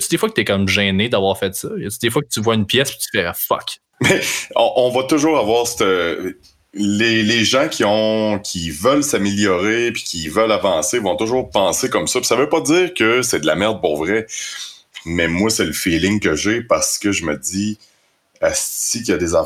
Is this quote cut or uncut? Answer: uncut